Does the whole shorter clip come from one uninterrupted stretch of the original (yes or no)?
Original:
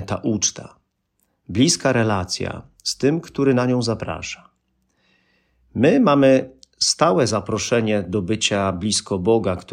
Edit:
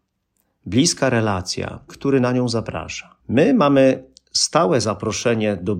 no